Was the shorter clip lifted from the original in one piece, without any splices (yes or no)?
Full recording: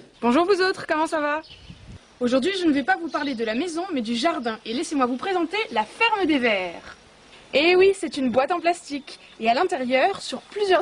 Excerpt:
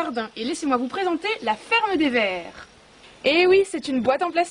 yes